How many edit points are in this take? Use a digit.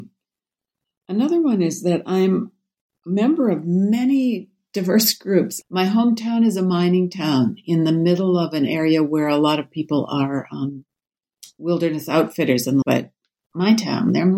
2